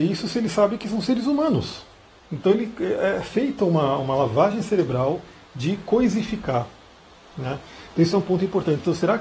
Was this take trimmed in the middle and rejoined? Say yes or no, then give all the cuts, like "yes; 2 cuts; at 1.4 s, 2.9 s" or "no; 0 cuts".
no; 0 cuts